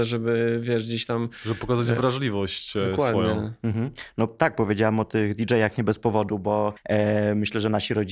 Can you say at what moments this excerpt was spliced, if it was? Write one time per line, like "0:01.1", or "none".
none